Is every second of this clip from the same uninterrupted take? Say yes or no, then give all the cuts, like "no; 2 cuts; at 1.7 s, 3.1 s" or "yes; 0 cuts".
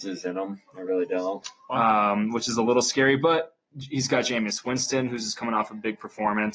no; 1 cut; at 1.4 s